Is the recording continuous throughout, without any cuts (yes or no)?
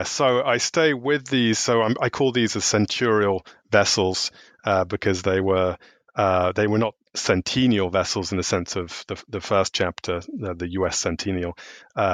yes